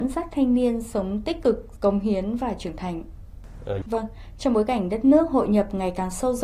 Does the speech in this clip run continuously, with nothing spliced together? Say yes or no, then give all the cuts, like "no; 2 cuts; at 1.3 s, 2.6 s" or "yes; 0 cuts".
no; 1 cut; at 3.8 s